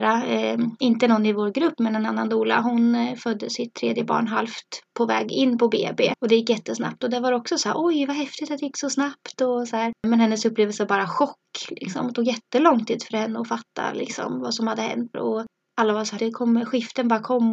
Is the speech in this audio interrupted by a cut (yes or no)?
yes